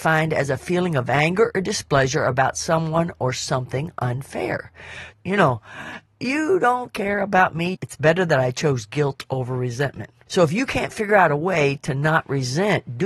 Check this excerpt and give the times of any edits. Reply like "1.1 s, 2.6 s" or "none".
5.1 s, 7.7 s, 10.3 s